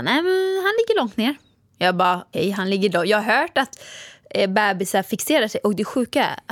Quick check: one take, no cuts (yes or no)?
no